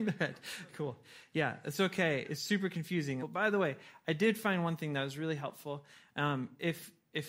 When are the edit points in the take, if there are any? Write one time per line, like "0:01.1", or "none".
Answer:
0:03.2